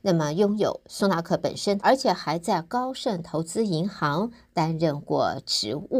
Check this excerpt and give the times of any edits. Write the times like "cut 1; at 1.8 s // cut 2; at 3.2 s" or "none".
cut 1; at 1.8 s